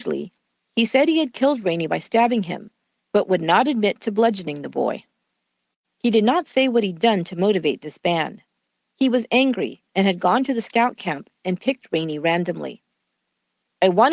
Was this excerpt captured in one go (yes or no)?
no